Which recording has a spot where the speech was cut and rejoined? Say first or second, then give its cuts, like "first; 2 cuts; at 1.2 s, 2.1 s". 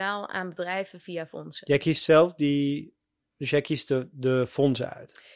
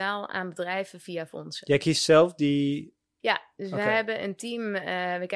second; 1 cut; at 3.2 s